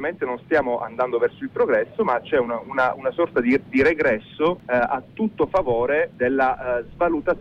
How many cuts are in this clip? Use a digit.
0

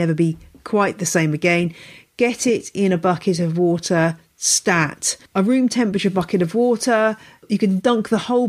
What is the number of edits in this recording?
0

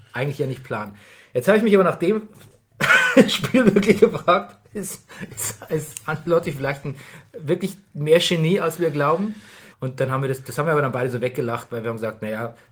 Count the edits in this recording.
1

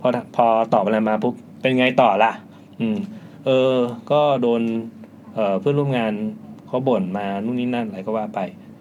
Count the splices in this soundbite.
0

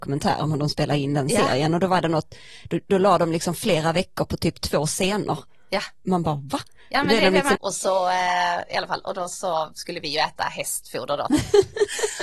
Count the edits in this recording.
2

